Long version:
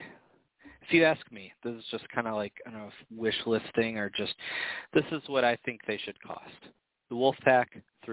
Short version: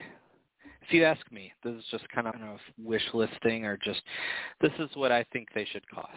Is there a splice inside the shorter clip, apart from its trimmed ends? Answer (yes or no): yes